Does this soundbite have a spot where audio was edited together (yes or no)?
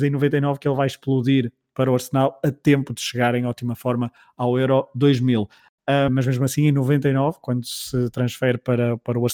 yes